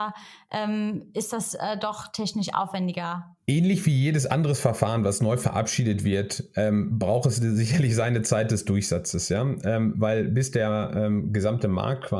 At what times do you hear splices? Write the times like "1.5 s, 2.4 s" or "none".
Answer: none